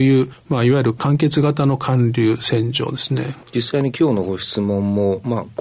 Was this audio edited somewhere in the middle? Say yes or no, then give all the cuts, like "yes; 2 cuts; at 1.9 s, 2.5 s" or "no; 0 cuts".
yes; 1 cut; at 3.4 s